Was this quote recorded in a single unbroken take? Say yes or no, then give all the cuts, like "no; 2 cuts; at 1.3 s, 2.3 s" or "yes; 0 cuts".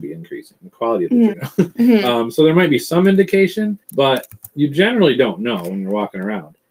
no; 2 cuts; at 1.3 s, 3.8 s